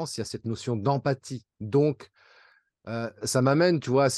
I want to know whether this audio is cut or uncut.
cut